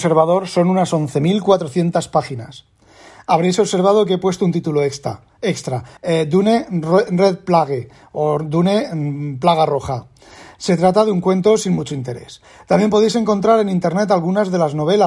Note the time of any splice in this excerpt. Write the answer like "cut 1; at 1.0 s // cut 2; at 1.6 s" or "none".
cut 1; at 6.0 s